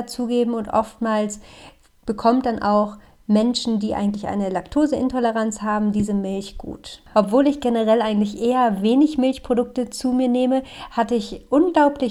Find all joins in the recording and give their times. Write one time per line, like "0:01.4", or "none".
0:07.1